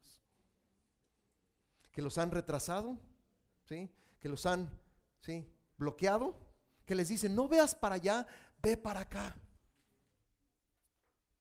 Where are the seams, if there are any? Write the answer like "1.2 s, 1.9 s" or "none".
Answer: none